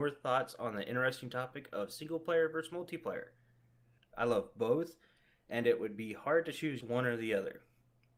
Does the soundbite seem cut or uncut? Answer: cut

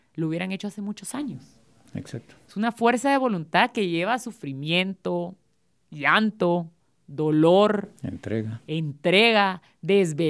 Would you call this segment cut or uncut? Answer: uncut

